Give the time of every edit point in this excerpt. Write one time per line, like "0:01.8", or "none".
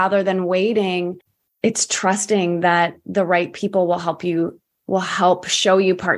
0:04.7